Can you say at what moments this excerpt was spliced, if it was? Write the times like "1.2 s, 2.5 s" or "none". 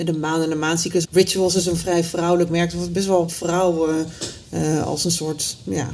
1.0 s

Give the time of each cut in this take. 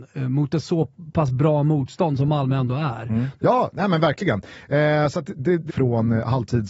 3.4 s, 5.7 s

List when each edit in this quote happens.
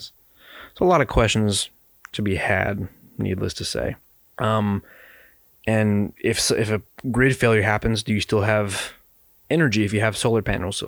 4.4 s, 6.2 s

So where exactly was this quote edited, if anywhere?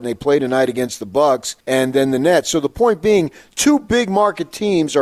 1.6 s

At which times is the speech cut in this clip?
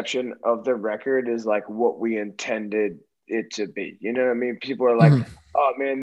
none

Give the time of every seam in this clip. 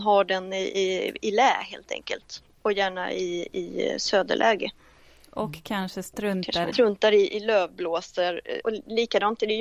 6.7 s, 8.6 s

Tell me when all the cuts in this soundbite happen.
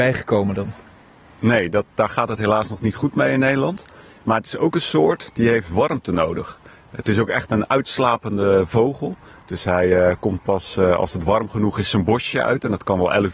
none

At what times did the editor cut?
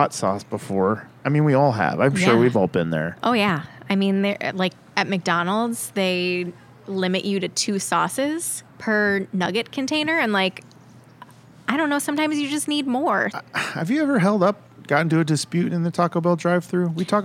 8.7 s, 13.3 s

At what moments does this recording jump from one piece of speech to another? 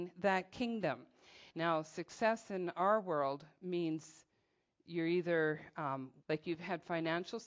1.5 s, 6.2 s

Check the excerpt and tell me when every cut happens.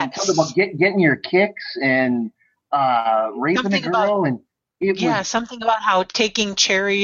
none

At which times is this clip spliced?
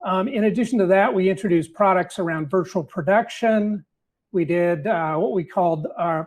none

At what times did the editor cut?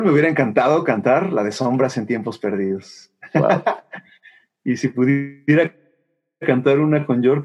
none

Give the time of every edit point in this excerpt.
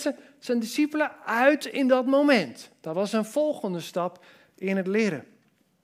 none

